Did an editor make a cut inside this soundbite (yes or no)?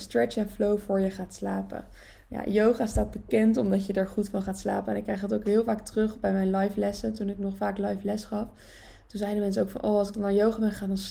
no